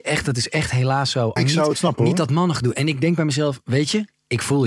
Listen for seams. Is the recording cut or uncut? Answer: cut